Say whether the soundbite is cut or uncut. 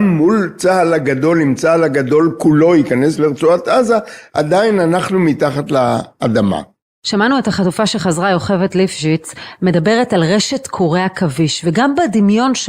uncut